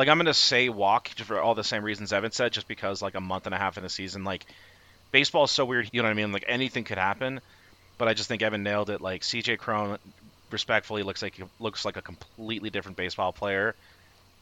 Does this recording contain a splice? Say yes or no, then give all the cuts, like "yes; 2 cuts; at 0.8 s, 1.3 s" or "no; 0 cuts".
yes; 1 cut; at 5.9 s